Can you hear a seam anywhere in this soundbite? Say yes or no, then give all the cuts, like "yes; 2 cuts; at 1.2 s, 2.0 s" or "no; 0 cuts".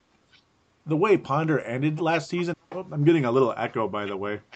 yes; 1 cut; at 2.5 s